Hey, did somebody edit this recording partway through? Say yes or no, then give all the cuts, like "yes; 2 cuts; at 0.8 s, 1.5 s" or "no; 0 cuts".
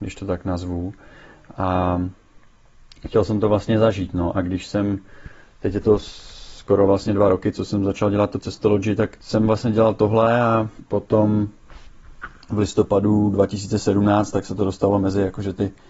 no; 0 cuts